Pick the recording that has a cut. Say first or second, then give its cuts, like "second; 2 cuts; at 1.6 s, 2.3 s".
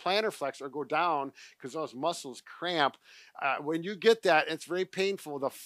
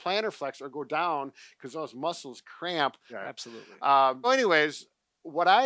second; 2 cuts; at 3.1 s, 4.2 s